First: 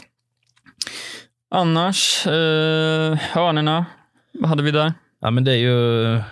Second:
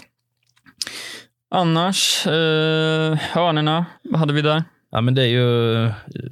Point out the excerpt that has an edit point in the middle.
second; 1 cut; at 3.9 s

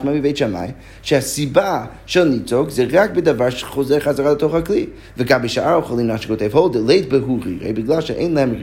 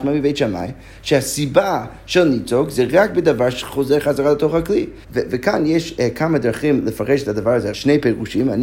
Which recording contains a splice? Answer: second; 2 cuts; at 5.0 s, 7.7 s

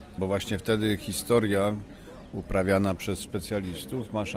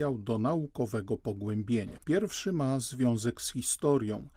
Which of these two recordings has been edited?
second; 1 cut; at 2.0 s

